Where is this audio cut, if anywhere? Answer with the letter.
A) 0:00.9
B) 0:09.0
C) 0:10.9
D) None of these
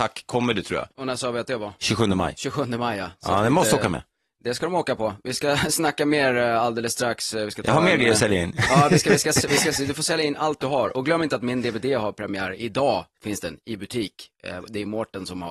A